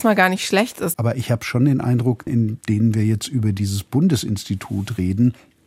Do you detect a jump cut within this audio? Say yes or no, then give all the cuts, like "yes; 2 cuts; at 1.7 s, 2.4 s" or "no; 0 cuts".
yes; 2 cuts; at 0.9 s, 2.3 s